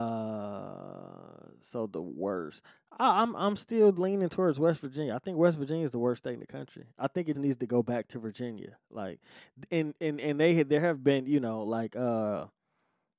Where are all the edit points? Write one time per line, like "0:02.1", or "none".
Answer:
0:07.3

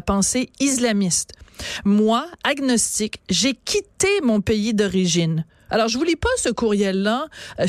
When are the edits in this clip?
0:05.7

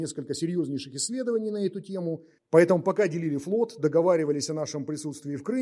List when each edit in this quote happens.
0:02.4

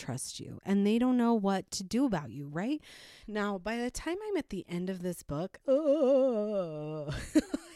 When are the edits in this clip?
0:03.2
0:05.6

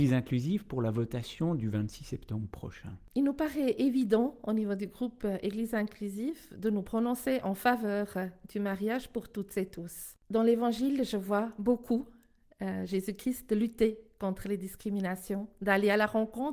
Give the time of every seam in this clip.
0:10.2

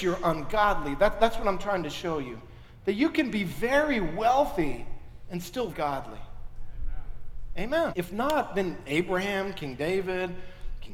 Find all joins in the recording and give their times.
0:05.7
0:07.9

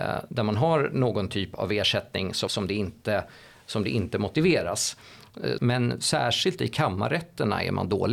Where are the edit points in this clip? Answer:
0:02.5
0:05.6

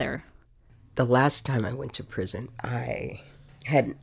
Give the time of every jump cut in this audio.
0:02.5

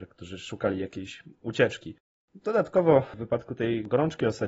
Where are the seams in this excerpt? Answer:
none

